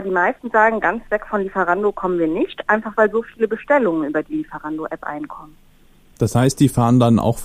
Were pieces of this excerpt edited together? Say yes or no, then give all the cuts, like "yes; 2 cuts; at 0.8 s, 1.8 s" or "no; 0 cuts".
no; 0 cuts